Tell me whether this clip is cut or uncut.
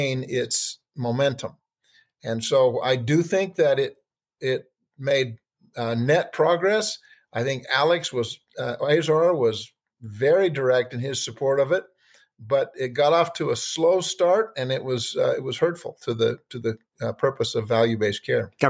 uncut